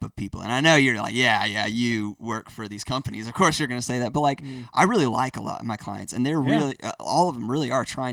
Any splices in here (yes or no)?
no